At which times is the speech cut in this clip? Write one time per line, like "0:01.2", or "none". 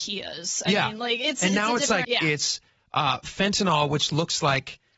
0:02.0